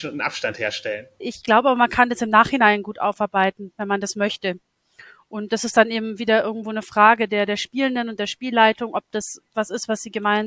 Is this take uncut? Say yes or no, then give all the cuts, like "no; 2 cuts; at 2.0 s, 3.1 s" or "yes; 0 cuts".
no; 1 cut; at 1.2 s